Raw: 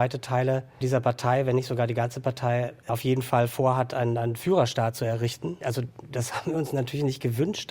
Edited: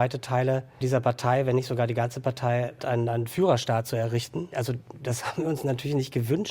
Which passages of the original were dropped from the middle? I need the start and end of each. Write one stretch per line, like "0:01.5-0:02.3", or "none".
0:02.8-0:03.9